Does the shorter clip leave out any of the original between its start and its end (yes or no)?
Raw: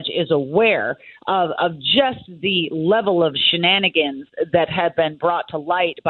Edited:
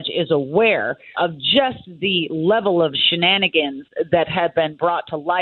yes